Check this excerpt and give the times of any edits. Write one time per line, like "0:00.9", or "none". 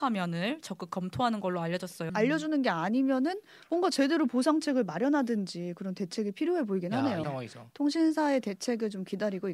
0:02.1
0:07.2